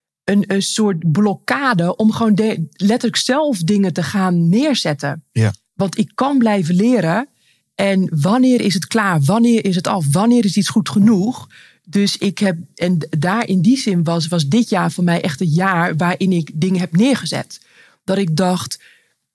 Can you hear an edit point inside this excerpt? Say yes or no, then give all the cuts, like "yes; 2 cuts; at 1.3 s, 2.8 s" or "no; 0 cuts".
no; 0 cuts